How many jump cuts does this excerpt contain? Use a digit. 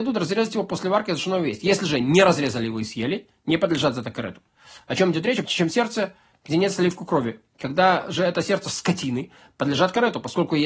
0